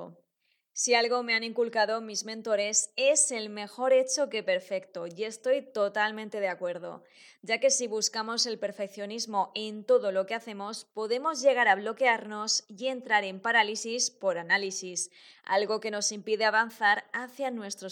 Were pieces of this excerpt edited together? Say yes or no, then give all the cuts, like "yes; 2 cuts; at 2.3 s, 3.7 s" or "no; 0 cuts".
no; 0 cuts